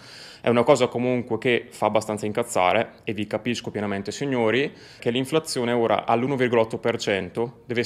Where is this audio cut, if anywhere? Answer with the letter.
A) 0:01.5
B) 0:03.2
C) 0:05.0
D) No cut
C